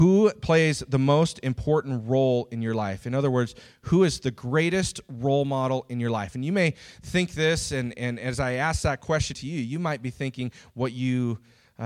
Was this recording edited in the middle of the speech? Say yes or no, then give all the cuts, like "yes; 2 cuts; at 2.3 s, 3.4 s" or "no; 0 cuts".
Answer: yes; 1 cut; at 9.3 s